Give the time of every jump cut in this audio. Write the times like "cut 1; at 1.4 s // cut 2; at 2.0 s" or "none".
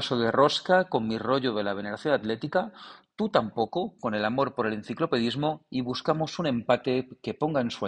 none